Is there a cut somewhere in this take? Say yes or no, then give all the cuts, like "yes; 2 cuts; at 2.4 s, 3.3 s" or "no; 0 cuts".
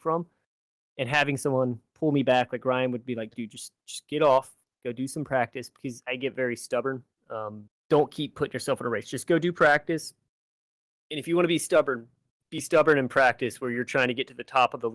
yes; 2 cuts; at 6.0 s, 7.7 s